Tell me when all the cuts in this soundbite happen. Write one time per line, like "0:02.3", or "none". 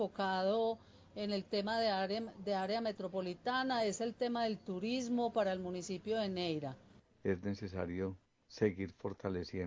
none